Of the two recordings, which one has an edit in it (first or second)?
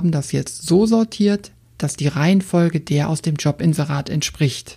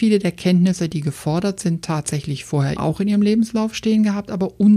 second